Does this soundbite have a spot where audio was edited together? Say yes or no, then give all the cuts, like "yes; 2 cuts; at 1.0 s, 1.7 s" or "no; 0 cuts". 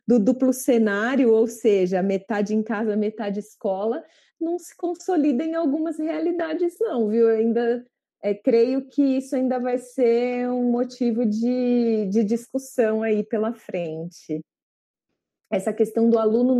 yes; 1 cut; at 15.4 s